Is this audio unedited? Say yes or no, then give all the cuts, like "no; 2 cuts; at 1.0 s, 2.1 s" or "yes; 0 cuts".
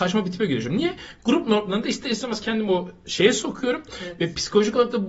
yes; 0 cuts